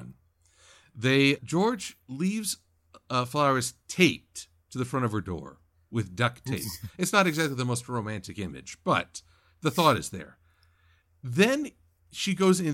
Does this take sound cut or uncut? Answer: cut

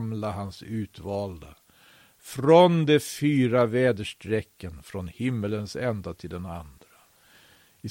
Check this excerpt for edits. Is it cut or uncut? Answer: uncut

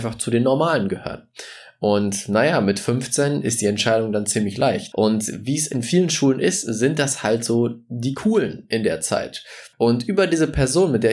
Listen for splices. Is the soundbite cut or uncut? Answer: cut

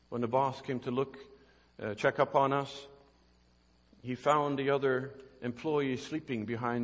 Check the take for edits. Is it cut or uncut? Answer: uncut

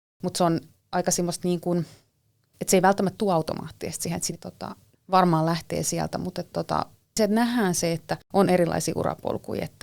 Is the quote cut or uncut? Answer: cut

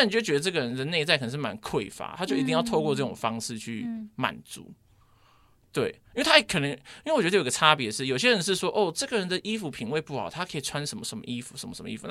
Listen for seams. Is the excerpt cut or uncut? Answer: uncut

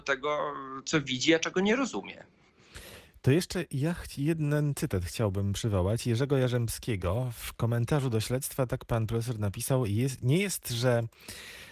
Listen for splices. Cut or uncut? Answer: uncut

